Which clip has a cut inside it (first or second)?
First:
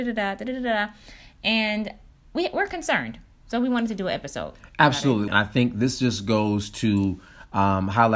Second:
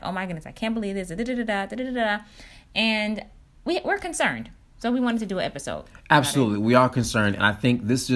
first